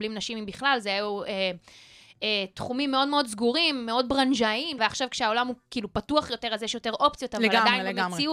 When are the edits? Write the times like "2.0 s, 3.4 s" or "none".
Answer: 4.8 s